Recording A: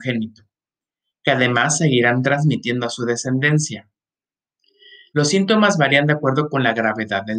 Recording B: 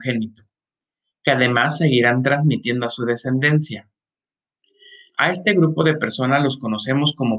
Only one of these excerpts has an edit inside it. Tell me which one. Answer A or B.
A